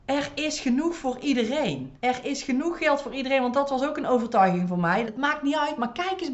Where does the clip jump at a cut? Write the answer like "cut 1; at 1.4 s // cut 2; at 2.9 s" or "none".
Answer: cut 1; at 2.0 s // cut 2; at 5.0 s